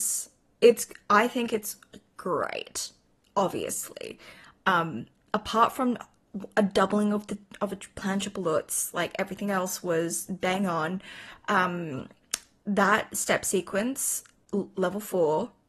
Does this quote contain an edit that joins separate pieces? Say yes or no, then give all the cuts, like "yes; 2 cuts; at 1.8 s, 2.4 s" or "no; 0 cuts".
no; 0 cuts